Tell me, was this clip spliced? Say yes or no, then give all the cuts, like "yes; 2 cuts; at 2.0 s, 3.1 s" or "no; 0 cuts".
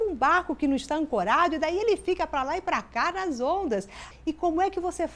yes; 1 cut; at 4.1 s